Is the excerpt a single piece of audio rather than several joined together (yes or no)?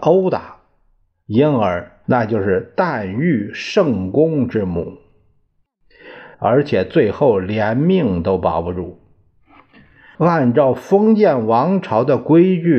no